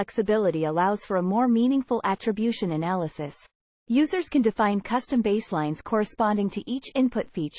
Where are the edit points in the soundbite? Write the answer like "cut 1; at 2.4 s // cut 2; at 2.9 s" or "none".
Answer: cut 1; at 3.8 s